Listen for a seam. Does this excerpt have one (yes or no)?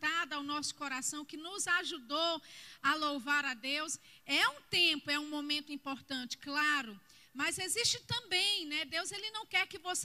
no